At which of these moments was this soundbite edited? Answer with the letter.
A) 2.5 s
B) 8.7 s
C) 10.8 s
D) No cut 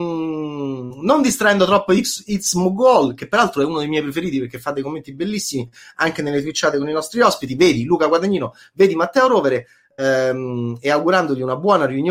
D